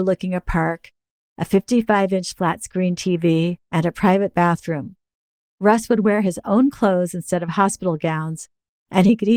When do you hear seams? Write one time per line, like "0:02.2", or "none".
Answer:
none